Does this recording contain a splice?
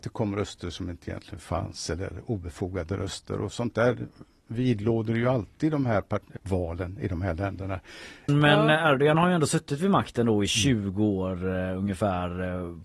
yes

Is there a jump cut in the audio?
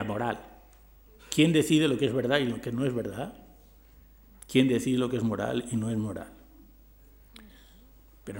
no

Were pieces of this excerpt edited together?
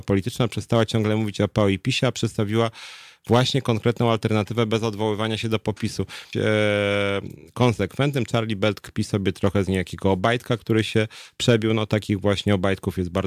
yes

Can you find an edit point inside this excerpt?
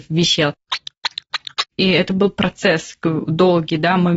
yes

